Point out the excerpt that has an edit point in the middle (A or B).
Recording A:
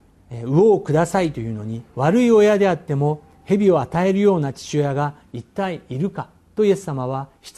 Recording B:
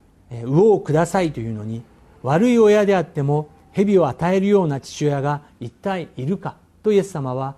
A